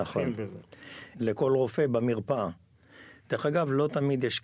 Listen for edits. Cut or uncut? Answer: cut